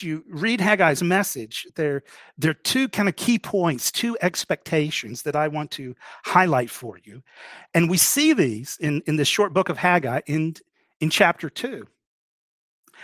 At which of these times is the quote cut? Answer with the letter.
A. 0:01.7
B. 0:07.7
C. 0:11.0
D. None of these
D